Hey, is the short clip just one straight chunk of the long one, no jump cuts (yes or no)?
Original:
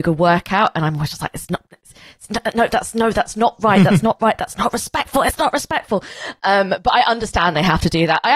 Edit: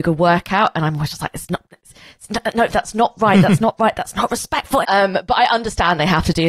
no